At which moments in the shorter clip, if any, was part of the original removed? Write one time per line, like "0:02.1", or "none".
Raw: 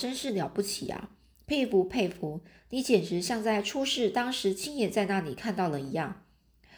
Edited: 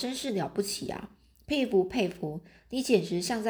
none